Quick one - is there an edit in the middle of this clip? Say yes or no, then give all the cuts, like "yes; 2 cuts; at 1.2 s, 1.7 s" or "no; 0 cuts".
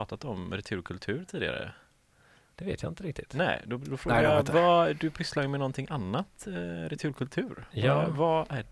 no; 0 cuts